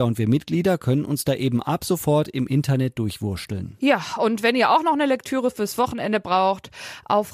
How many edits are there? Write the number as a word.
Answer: zero